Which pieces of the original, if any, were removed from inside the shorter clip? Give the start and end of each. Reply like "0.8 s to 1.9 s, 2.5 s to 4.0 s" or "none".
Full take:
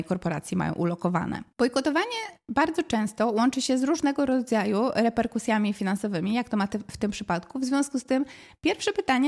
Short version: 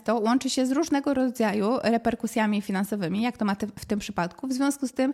none